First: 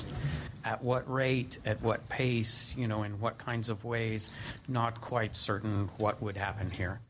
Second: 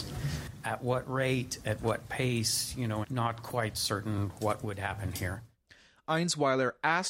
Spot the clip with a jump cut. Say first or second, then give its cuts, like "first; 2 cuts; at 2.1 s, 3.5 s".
second; 1 cut; at 3.0 s